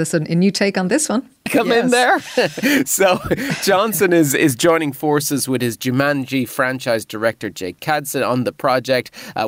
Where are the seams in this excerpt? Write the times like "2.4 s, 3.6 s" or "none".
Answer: 1.5 s